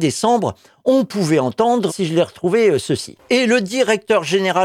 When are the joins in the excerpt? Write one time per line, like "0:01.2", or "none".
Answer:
0:01.9
0:03.3